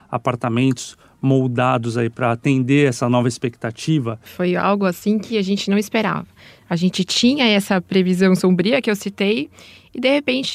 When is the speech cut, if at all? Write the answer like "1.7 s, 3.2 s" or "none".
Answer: 4.3 s